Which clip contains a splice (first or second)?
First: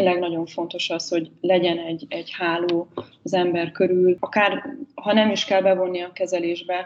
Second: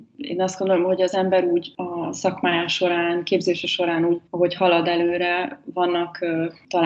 second